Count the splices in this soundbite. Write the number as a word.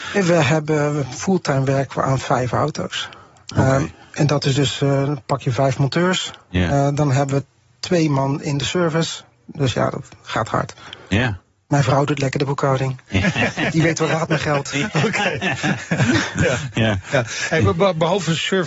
zero